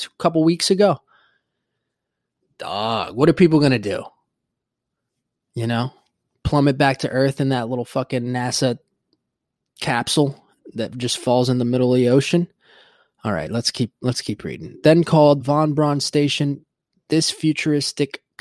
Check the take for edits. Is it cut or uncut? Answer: cut